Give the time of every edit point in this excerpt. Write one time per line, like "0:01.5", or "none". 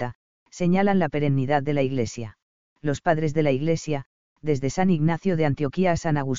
0:02.7